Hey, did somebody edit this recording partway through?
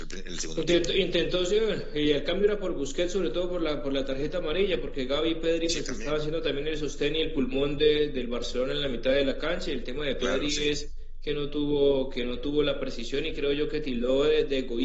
no; 0 cuts

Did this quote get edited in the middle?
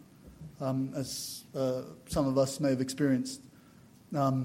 no; 0 cuts

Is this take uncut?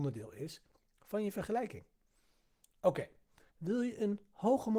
no; 1 cut; at 3.5 s

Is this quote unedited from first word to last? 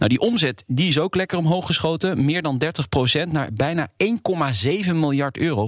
yes; 0 cuts

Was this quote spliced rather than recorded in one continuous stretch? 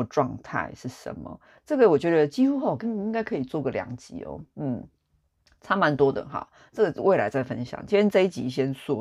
no; 0 cuts

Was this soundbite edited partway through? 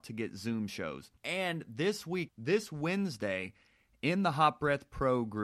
yes; 2 cuts; at 1.2 s, 2.3 s

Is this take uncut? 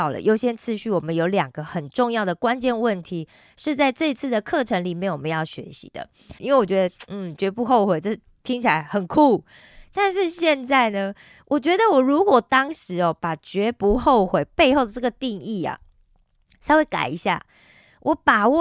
no; 1 cut; at 6.4 s

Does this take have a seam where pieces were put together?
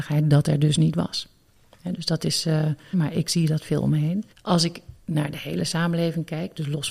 yes; 2 cuts; at 2.9 s, 4.3 s

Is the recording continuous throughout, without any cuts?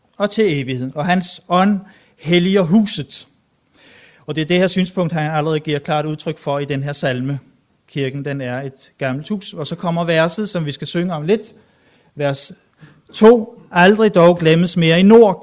yes; 0 cuts

